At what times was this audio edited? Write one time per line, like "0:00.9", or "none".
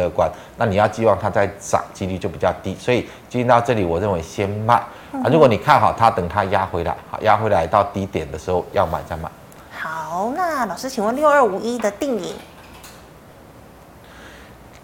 none